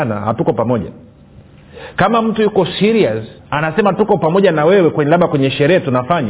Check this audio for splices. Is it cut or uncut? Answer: cut